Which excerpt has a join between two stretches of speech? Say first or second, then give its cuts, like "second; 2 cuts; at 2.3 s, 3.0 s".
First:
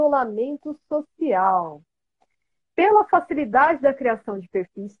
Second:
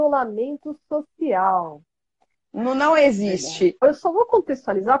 second; 2 cuts; at 2.3 s, 3.8 s